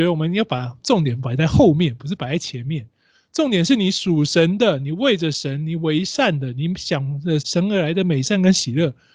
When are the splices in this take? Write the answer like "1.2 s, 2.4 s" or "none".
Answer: 7.4 s